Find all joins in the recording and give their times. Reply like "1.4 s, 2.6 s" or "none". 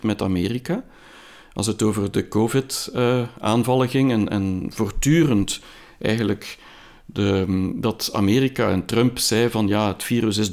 none